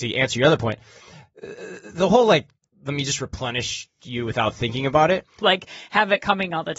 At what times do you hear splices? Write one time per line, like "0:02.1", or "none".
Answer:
0:05.4